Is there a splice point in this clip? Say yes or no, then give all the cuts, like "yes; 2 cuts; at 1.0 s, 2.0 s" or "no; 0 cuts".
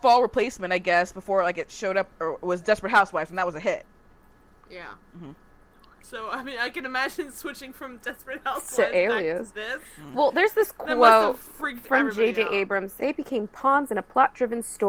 yes; 1 cut; at 13.0 s